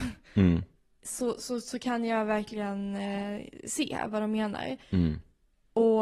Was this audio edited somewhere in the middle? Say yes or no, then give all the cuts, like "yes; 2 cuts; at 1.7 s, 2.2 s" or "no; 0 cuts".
no; 0 cuts